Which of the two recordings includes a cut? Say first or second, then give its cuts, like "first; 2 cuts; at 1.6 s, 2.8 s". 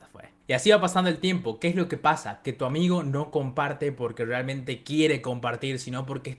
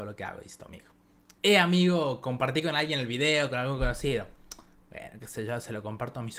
second; 1 cut; at 1.4 s